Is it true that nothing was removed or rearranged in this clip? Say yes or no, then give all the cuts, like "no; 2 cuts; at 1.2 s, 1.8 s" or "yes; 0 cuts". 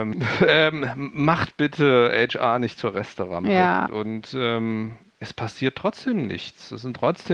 no; 1 cut; at 3.9 s